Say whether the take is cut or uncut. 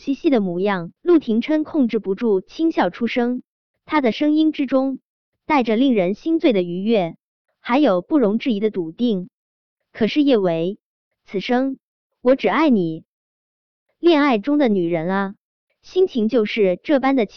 cut